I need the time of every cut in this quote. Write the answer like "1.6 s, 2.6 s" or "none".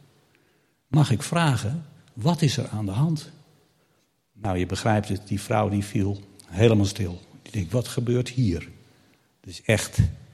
none